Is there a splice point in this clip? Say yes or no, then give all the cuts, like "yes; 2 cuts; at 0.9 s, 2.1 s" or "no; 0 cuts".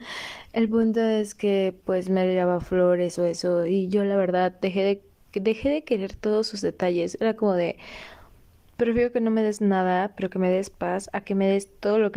no; 0 cuts